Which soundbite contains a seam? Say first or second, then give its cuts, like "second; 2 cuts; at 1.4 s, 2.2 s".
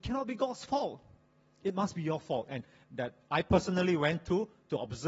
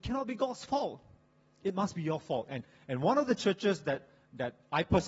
first; 1 cut; at 2.8 s